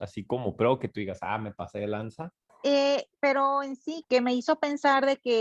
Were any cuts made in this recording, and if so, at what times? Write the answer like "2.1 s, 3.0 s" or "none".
2.5 s, 4.0 s